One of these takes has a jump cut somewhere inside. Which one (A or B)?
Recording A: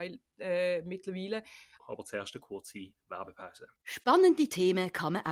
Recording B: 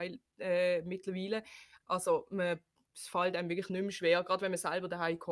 A